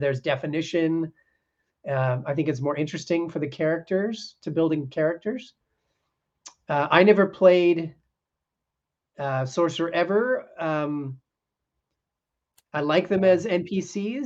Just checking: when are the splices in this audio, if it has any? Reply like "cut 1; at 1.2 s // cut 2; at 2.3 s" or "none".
none